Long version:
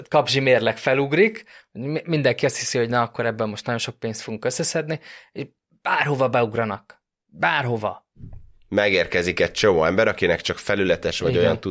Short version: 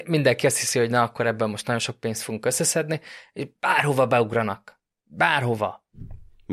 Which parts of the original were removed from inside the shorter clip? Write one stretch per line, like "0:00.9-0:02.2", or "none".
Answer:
0:05.5-0:05.8